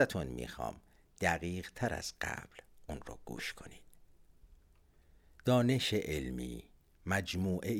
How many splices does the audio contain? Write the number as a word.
zero